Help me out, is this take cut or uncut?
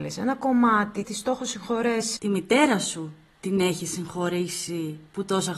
cut